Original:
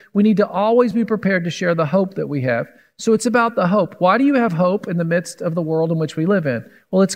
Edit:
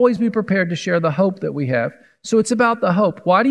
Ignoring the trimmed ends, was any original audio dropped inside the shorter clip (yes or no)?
no